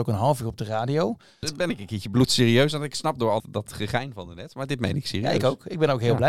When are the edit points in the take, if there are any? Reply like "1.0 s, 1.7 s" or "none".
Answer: 1.4 s, 3.4 s